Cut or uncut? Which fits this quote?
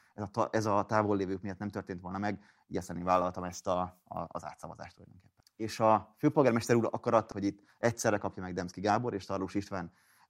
cut